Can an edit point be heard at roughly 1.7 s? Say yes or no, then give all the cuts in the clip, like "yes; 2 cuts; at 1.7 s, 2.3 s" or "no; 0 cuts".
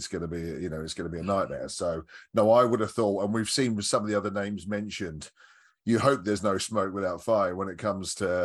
no; 0 cuts